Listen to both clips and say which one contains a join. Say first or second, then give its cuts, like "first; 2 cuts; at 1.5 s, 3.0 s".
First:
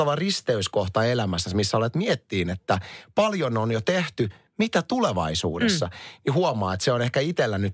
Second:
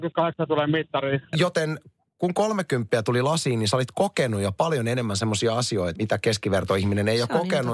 second; 2 cuts; at 1.3 s, 5.9 s